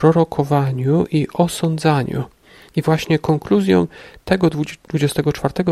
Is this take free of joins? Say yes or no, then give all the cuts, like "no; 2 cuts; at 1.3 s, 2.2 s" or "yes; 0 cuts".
yes; 0 cuts